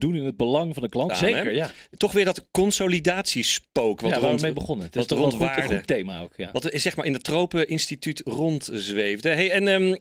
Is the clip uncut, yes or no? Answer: no